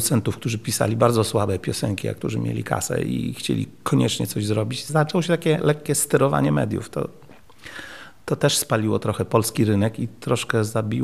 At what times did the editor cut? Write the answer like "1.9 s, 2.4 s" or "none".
none